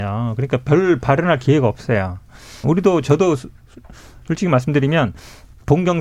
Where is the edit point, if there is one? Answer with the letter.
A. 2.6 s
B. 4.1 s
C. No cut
A